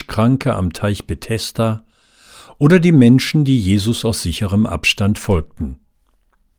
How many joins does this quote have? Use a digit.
0